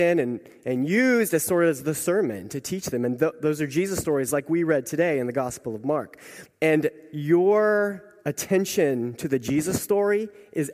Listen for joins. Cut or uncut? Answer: cut